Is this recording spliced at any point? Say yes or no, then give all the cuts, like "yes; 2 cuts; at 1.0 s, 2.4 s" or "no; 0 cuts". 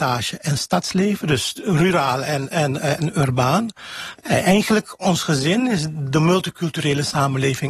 yes; 1 cut; at 4.1 s